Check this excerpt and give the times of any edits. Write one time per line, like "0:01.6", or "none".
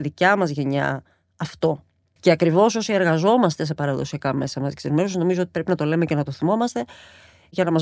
0:02.2